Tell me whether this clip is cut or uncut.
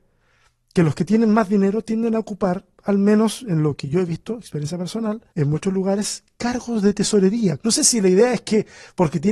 cut